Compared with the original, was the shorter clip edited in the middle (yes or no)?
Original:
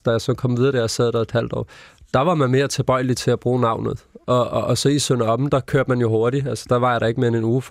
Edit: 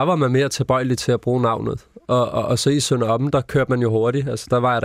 no